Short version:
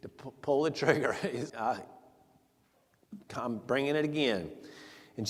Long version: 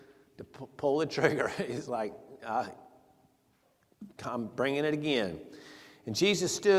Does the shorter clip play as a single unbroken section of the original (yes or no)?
no